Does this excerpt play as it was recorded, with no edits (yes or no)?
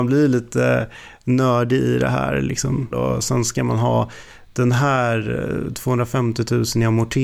no